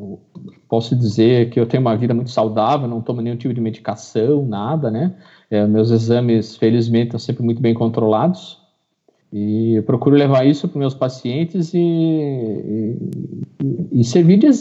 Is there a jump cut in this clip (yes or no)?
no